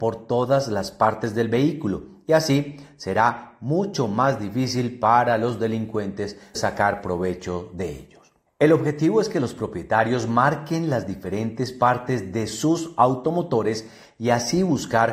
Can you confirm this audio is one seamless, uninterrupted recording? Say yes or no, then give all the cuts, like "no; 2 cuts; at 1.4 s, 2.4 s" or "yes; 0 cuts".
no; 2 cuts; at 6.5 s, 8.5 s